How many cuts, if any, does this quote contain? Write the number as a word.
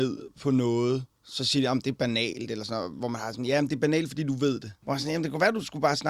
two